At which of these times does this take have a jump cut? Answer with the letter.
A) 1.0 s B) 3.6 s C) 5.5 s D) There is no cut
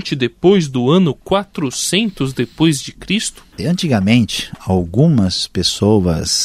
B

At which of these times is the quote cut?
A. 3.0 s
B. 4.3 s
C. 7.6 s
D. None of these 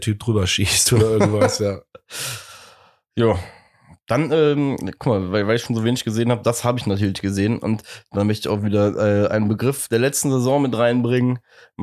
D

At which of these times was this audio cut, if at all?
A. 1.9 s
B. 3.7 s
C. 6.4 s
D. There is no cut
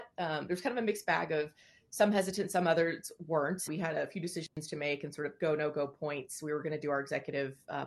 B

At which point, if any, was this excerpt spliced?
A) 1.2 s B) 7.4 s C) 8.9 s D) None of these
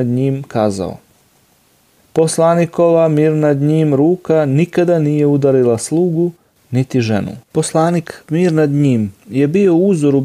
B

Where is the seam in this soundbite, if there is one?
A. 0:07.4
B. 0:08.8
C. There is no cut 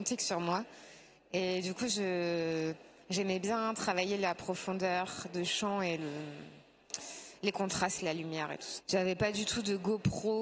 B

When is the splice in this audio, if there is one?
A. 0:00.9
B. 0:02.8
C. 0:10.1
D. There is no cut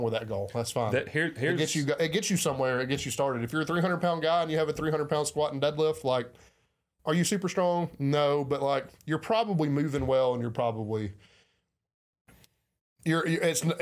D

